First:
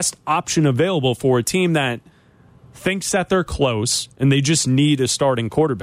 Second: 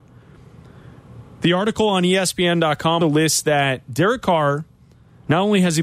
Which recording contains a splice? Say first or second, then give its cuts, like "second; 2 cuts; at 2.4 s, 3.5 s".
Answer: second; 1 cut; at 3.0 s